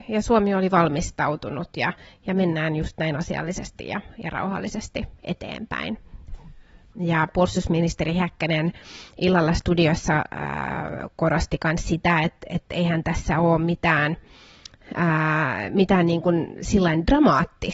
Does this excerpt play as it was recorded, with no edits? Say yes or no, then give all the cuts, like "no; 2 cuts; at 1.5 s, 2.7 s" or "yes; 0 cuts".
no; 1 cut; at 6.9 s